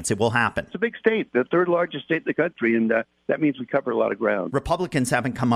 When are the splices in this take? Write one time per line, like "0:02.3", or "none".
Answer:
none